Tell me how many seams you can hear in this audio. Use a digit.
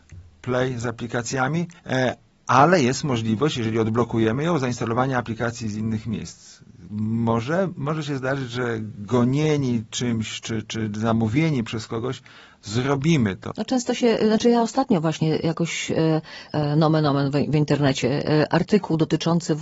3